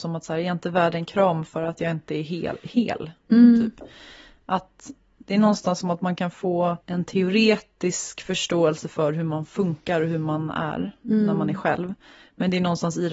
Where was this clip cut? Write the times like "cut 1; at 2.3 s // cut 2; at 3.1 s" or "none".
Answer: cut 1; at 6.8 s